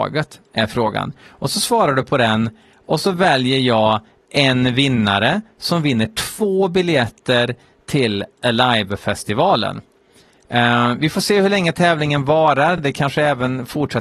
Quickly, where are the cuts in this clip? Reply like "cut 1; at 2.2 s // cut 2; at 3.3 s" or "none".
none